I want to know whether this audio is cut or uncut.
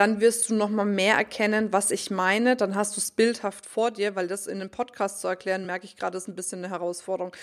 uncut